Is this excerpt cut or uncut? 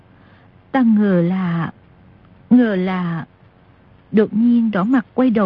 uncut